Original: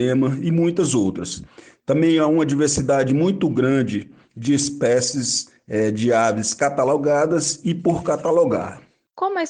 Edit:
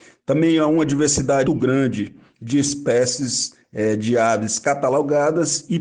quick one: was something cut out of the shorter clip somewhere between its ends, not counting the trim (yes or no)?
yes